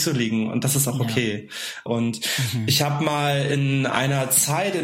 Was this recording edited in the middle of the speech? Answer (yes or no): yes